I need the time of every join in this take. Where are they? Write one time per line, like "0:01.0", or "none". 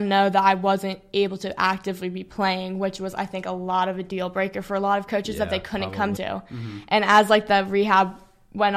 0:06.2